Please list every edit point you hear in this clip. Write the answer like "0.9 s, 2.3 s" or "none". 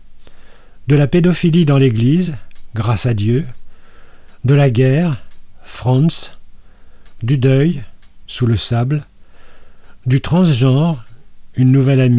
none